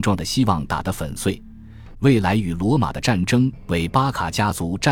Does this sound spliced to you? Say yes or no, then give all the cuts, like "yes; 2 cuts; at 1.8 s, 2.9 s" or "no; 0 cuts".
yes; 1 cut; at 1.9 s